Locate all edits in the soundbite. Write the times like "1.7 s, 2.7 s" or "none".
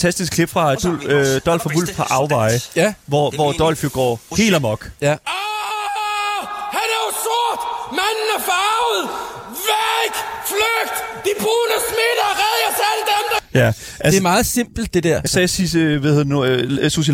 15.3 s